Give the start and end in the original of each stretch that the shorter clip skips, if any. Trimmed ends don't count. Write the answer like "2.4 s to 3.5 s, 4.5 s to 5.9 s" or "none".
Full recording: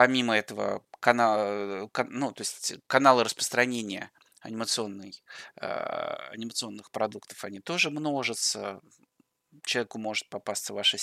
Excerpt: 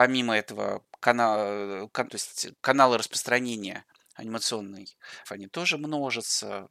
2.1 s to 2.3 s, 5.5 s to 7.4 s